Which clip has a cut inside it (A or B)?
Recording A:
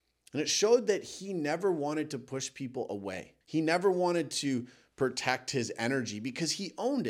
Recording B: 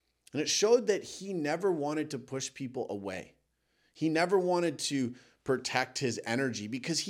A